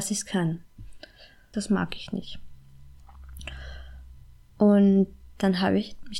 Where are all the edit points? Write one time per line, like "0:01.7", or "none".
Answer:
0:01.5